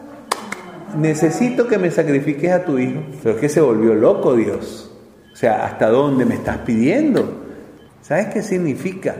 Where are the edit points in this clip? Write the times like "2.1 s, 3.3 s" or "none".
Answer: 3.2 s, 7.9 s